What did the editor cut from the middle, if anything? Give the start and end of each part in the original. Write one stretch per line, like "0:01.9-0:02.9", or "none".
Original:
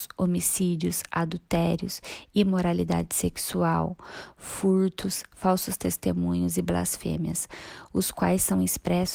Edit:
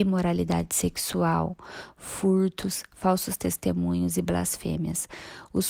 none